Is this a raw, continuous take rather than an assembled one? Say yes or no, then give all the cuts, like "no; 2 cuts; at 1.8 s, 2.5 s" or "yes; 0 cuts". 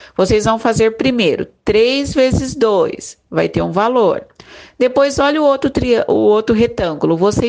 yes; 0 cuts